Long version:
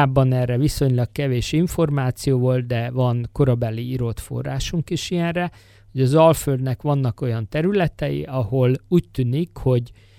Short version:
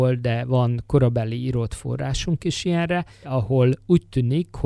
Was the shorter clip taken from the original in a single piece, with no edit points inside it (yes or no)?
no